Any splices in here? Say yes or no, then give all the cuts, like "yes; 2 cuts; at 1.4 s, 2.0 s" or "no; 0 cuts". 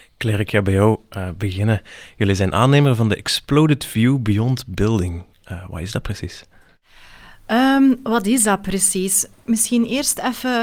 no; 0 cuts